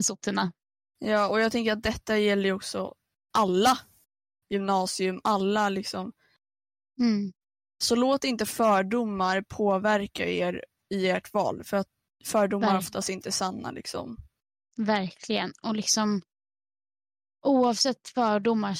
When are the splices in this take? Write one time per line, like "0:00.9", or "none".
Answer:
none

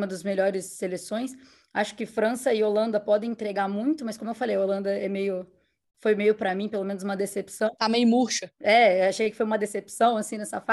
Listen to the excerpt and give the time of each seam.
none

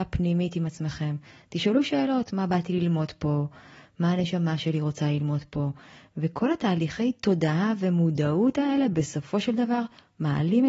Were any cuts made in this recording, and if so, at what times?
none

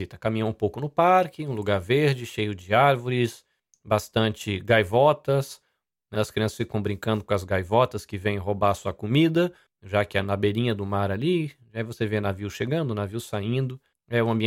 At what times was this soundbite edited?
0:06.1

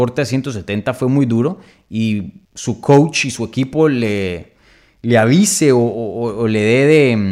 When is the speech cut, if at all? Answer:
0:02.4

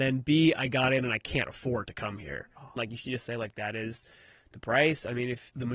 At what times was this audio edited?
0:02.8

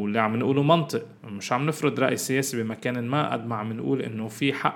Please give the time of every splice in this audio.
0:01.2

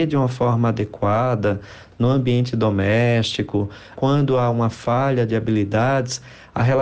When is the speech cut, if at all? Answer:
0:03.9

